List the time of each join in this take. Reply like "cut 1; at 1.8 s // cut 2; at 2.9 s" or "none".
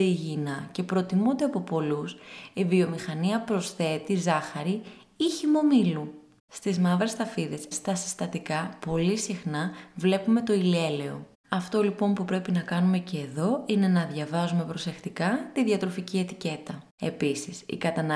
cut 1; at 7.7 s // cut 2; at 16.9 s